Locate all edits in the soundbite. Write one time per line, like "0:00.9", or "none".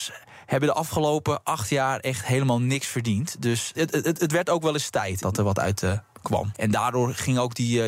0:03.7
0:05.2
0:06.5